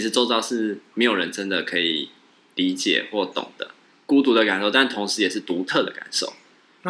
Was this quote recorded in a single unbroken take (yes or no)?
no